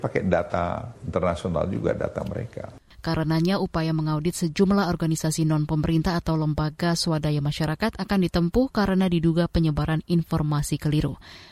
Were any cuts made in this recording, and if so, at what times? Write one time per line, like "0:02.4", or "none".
0:02.9